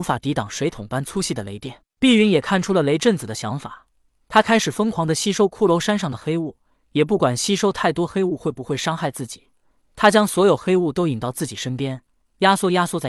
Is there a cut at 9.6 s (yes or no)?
no